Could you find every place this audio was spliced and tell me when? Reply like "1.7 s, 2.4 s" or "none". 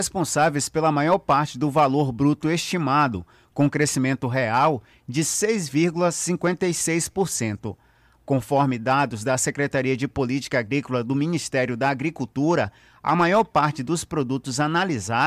8.1 s